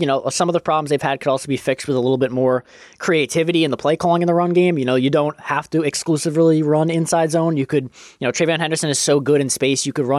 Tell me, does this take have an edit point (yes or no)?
no